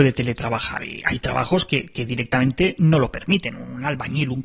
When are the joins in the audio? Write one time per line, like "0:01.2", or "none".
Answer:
none